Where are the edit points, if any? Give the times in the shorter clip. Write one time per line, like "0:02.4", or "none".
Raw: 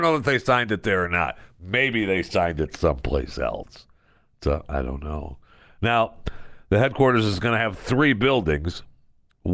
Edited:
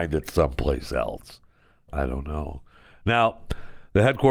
0:01.9